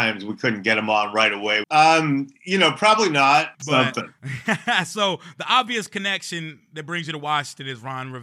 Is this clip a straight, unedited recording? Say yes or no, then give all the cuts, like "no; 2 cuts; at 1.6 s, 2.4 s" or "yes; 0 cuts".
no; 2 cuts; at 1.6 s, 3.5 s